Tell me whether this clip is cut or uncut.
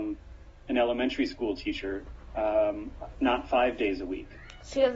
cut